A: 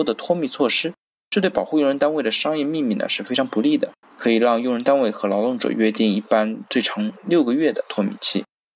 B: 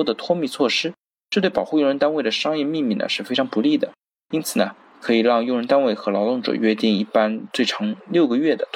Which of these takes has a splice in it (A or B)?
A